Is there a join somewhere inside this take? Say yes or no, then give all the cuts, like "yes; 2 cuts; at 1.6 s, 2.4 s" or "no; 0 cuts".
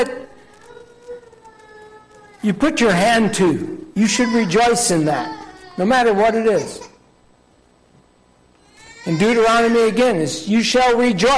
no; 0 cuts